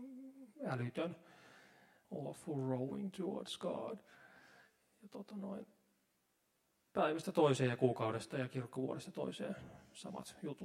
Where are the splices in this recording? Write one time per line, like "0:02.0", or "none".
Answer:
0:02.0